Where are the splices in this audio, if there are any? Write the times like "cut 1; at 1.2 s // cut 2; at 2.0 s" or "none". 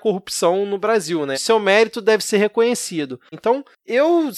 cut 1; at 1.3 s // cut 2; at 3.3 s